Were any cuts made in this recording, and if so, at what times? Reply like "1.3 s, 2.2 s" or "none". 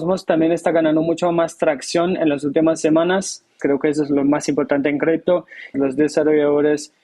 3.6 s, 5.7 s